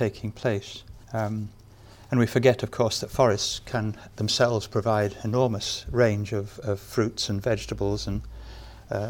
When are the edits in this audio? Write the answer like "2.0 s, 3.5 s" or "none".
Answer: 1.0 s